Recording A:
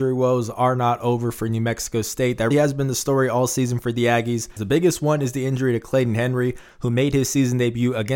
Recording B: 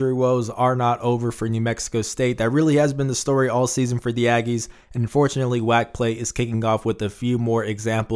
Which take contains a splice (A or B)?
A